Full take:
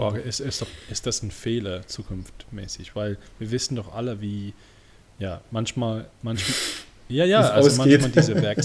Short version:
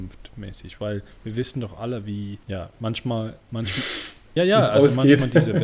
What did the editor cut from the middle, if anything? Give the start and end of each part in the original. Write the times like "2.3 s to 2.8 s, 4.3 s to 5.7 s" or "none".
4.6 s to 5.1 s, 7.1 s to 7.2 s